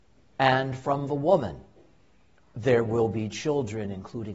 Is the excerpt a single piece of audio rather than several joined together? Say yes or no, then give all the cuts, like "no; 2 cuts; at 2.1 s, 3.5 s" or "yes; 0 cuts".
yes; 0 cuts